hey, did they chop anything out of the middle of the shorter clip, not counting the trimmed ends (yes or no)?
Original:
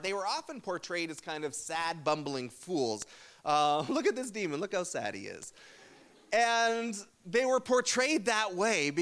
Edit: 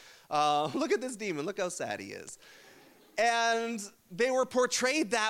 no